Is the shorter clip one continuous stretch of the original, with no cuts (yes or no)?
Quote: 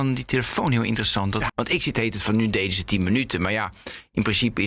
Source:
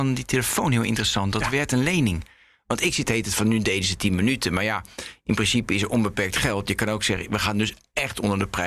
no